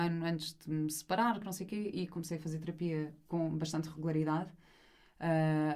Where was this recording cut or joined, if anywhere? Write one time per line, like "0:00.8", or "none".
0:01.4